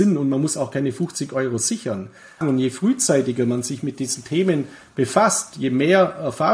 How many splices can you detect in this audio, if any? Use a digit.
1